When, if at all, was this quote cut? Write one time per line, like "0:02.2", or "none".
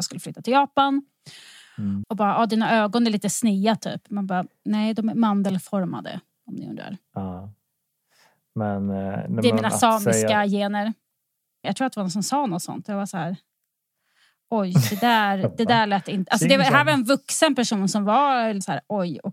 0:02.0
0:11.6